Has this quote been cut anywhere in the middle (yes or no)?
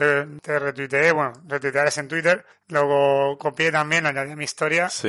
no